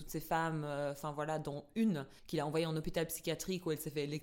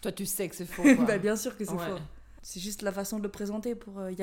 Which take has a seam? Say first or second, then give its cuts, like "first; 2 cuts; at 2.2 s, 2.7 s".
second; 1 cut; at 2.4 s